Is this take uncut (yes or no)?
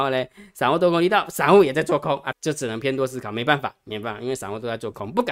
no